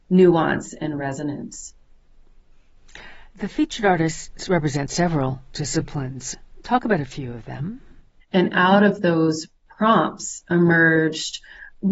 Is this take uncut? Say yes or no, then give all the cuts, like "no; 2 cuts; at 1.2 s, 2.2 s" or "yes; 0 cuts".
no; 1 cut; at 8.2 s